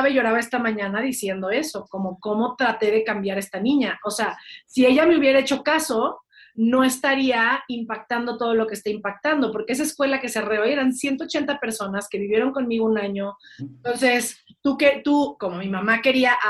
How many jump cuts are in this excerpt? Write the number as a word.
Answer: one